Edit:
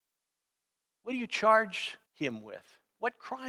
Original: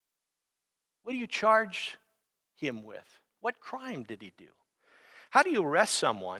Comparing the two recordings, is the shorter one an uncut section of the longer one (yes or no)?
no